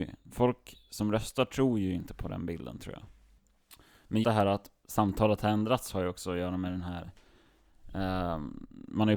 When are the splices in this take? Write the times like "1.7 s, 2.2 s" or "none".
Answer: 4.2 s